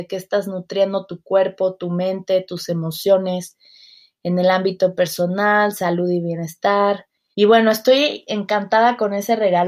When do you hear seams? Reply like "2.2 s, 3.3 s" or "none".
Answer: 7.3 s